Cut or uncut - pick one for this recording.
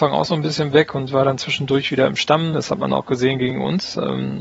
cut